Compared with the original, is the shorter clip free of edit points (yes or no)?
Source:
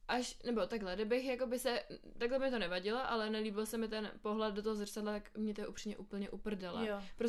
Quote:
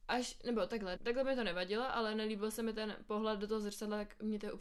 no